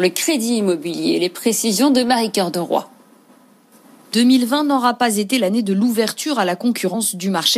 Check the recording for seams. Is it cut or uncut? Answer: uncut